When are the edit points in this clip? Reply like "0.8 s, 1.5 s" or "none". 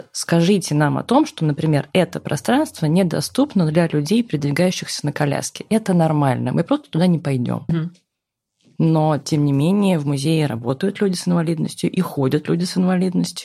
7.7 s